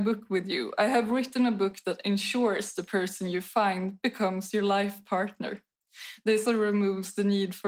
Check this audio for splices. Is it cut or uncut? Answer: cut